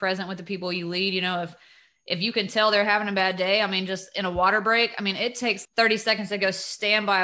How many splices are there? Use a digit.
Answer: 1